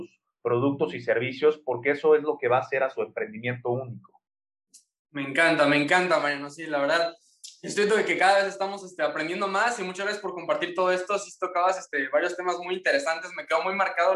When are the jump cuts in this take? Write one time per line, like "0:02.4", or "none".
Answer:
none